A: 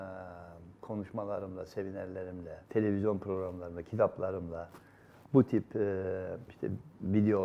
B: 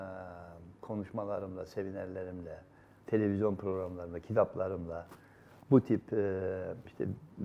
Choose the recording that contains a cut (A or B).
A